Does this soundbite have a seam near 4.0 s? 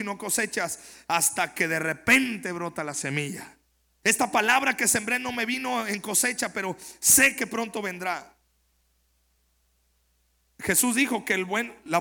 yes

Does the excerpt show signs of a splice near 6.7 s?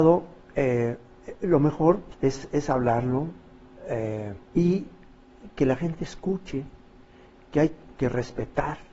no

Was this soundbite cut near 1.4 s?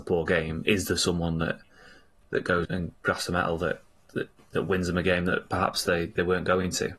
no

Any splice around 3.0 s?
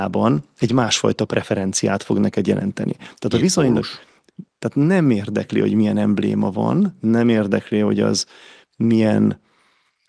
no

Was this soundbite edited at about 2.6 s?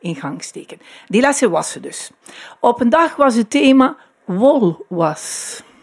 no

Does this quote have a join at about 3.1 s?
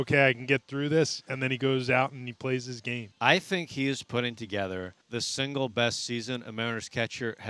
yes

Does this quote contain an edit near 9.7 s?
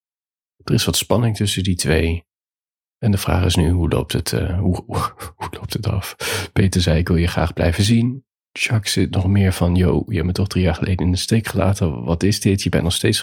no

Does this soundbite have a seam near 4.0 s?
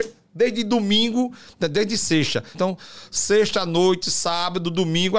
no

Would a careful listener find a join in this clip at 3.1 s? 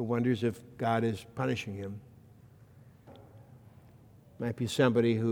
yes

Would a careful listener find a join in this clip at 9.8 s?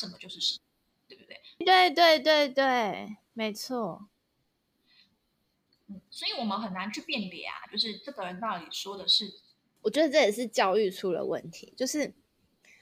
yes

